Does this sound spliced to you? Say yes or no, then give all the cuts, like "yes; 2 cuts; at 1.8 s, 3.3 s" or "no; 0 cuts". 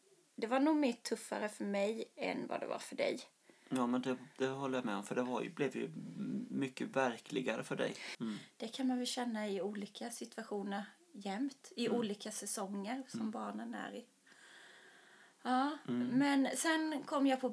yes; 1 cut; at 8.1 s